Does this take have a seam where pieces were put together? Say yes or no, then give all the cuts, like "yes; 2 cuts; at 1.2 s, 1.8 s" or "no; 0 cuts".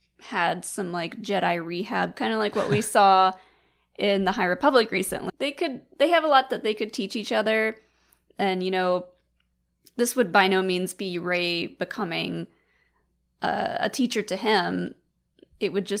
yes; 1 cut; at 5.3 s